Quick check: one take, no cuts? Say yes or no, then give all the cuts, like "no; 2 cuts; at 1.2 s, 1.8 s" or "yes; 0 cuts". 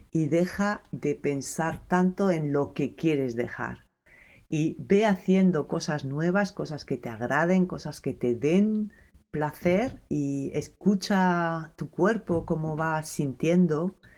no; 1 cut; at 10.1 s